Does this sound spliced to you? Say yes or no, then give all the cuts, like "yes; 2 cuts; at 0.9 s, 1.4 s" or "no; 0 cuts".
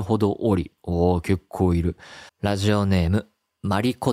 yes; 1 cut; at 2.3 s